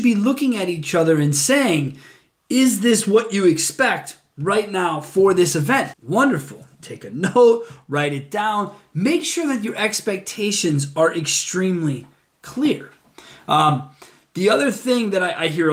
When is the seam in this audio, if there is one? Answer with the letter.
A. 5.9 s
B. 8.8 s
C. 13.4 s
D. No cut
A